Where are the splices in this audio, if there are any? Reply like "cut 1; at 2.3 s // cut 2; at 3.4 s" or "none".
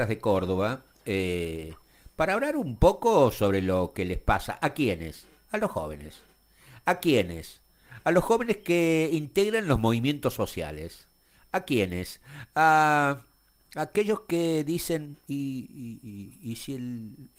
none